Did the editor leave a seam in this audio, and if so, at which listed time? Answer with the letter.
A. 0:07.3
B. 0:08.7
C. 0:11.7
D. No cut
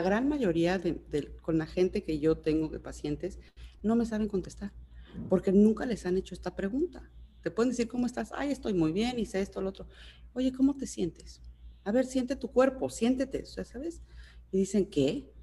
C